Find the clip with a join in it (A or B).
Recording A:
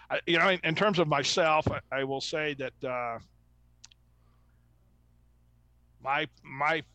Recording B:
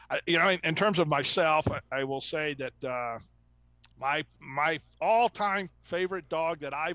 B